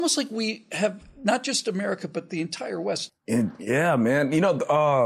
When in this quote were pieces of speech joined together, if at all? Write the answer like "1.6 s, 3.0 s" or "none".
3.1 s